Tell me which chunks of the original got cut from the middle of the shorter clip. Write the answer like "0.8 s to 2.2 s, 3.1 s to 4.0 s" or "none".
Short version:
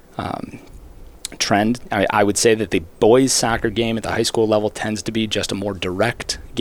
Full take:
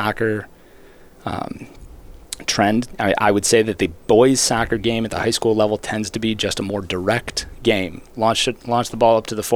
none